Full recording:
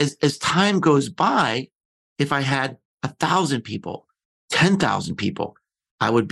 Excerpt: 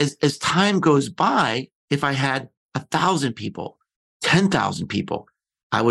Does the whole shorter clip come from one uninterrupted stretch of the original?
no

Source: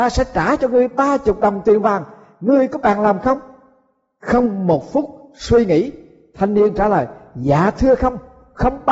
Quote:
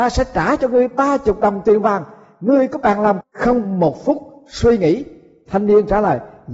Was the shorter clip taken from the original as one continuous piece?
no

